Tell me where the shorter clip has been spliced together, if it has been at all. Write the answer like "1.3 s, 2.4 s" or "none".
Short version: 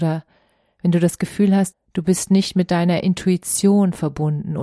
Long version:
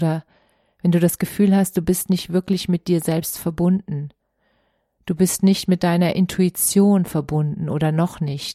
1.7 s